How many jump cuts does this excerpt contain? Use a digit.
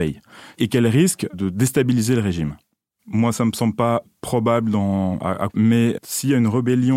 2